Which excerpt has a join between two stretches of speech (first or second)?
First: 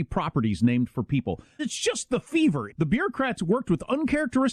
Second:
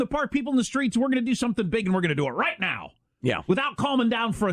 first